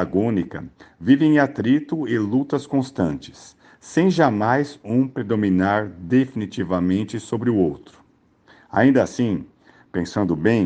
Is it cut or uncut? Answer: uncut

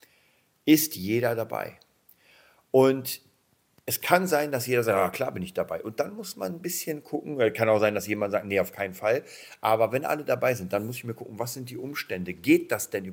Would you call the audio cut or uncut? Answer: uncut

